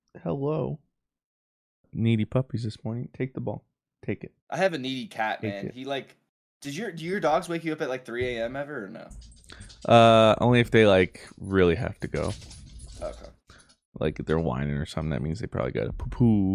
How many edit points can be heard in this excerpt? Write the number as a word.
one